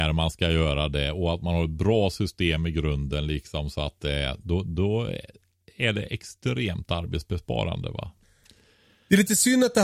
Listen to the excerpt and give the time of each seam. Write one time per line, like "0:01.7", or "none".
none